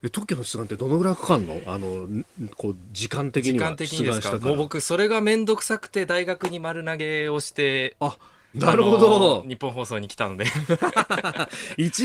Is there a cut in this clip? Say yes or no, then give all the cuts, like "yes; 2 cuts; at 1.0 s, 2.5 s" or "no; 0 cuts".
no; 0 cuts